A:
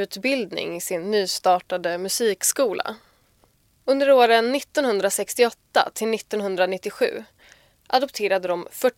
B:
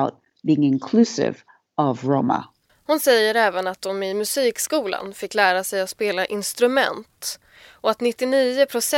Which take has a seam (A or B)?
B